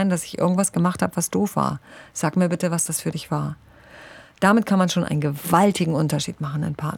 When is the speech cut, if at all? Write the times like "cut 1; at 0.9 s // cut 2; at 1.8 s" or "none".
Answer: none